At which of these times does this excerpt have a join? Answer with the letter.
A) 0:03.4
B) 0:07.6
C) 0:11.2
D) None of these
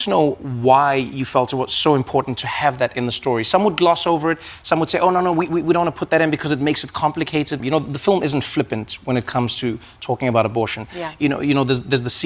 B